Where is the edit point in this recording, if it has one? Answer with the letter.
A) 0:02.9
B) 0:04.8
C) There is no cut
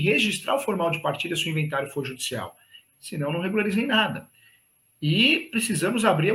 A